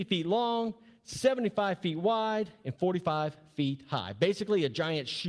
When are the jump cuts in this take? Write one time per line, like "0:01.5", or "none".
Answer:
none